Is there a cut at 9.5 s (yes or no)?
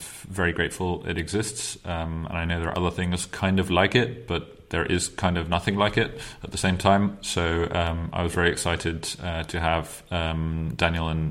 no